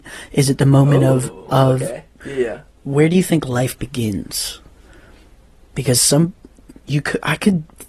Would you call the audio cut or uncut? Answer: cut